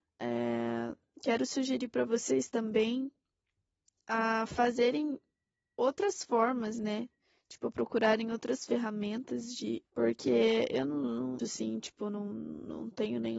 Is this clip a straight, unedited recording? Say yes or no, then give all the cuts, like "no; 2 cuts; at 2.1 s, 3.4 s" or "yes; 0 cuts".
no; 2 cuts; at 9.8 s, 11.4 s